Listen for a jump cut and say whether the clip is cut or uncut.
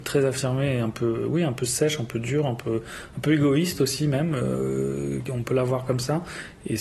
uncut